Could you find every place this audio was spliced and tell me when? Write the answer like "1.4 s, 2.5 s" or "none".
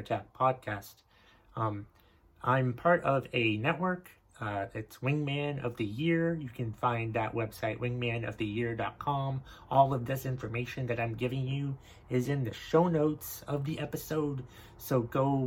none